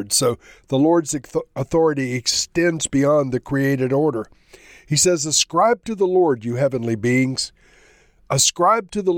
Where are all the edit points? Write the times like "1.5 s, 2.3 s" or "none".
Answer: none